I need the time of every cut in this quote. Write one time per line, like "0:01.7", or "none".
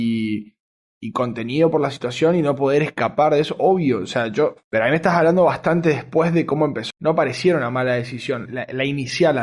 0:06.9
0:08.5

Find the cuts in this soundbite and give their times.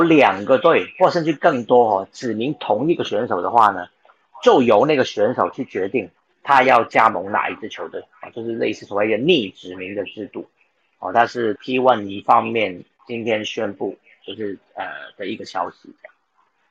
0:11.6

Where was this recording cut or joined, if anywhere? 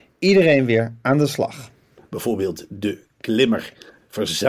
0:02.0

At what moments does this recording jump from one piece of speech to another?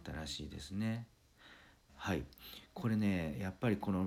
0:01.9

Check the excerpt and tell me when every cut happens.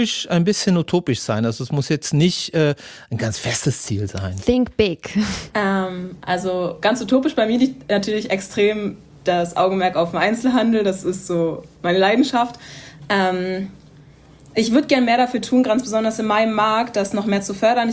0:05.5

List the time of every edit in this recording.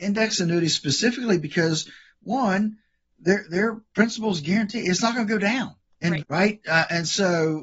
0:06.2

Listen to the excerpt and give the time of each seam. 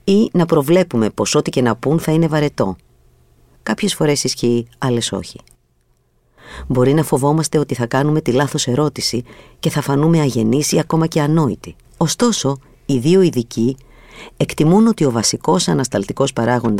0:03.6
0:11.8

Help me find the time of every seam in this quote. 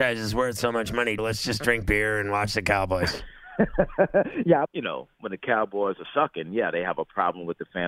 0:01.2
0:04.6

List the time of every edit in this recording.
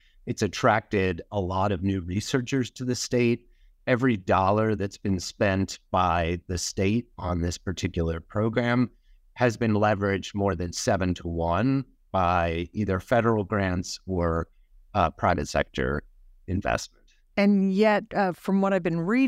none

